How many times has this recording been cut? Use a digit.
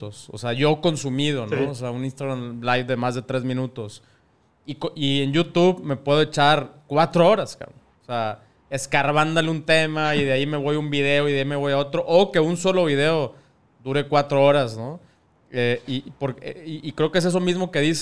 0